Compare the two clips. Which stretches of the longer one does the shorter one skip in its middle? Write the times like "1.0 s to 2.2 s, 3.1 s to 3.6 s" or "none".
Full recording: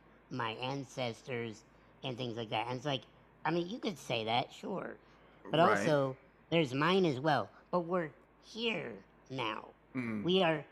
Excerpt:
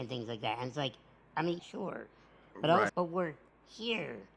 3.7 s to 4.5 s, 5.8 s to 7.7 s